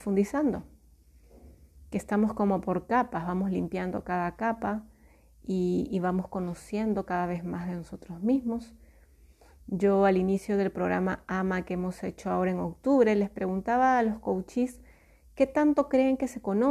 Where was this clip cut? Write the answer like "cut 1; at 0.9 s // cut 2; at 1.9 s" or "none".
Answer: none